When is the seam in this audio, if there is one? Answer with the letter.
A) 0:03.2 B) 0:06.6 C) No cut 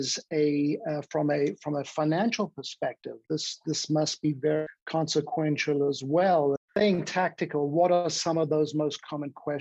B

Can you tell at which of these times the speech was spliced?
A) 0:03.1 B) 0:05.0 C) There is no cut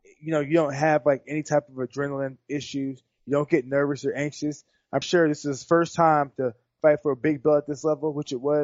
B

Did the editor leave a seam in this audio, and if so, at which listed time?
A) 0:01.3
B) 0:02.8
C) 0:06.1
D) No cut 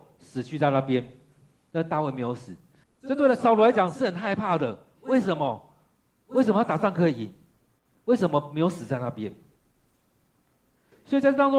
B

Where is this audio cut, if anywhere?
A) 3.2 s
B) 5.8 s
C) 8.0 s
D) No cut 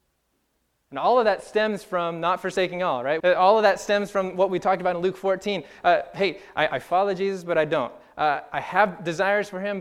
A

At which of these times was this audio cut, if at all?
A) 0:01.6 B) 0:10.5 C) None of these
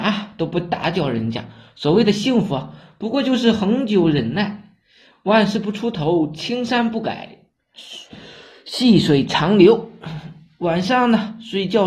C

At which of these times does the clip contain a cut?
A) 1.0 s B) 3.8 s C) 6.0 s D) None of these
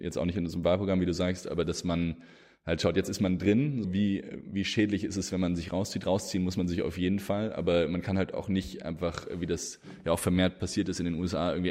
B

